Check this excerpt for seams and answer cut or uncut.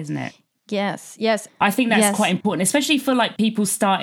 cut